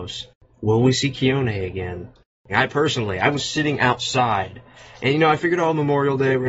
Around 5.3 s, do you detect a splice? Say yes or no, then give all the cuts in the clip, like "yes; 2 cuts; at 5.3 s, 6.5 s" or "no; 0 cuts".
no; 1 cut; at 2.5 s